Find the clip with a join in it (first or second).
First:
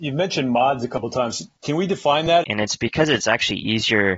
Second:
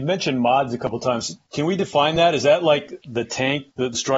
first